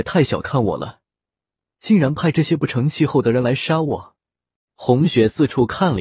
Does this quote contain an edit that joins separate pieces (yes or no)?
yes